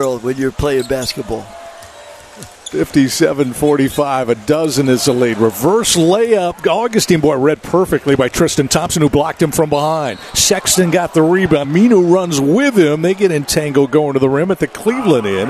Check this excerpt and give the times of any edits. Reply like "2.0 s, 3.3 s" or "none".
11.6 s

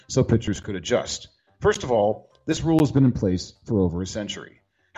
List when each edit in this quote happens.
none

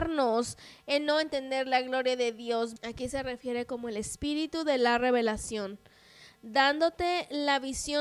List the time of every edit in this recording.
2.8 s

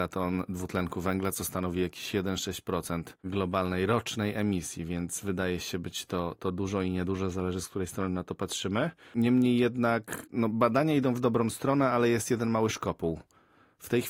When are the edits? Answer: none

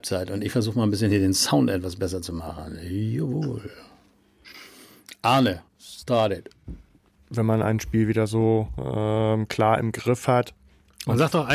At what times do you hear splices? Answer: 5.7 s, 7.2 s

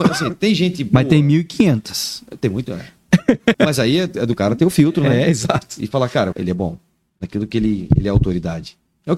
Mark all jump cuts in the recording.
3.5 s, 6.3 s

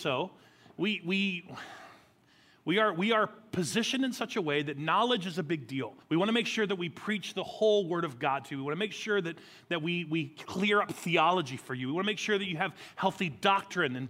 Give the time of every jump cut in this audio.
6.0 s

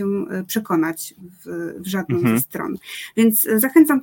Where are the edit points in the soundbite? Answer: none

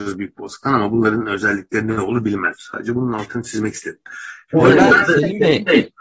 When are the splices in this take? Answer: 2.5 s

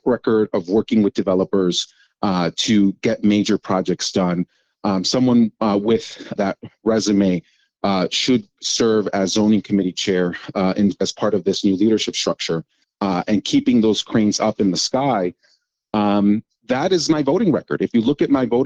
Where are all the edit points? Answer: 6.4 s, 12.8 s

